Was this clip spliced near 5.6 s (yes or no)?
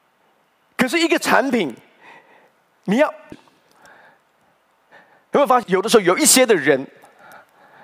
yes